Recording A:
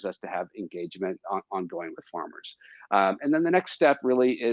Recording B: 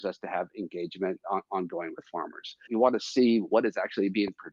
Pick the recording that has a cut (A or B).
B